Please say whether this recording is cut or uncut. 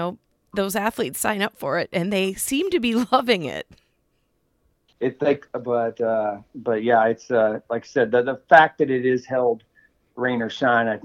cut